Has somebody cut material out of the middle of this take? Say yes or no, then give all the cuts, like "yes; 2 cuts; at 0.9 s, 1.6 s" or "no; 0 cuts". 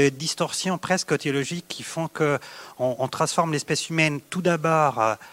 no; 0 cuts